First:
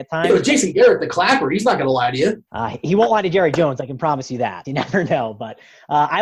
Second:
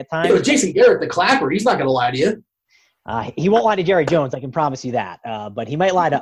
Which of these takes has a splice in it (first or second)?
first